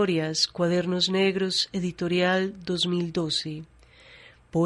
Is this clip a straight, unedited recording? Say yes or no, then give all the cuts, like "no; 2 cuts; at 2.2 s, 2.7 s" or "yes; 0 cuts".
yes; 0 cuts